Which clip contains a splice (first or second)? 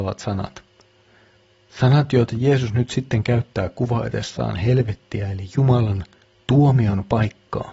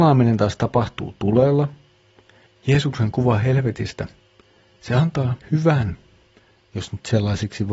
second